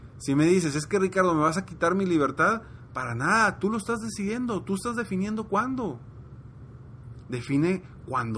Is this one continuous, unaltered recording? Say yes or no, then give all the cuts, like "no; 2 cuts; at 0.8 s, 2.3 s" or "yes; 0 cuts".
yes; 0 cuts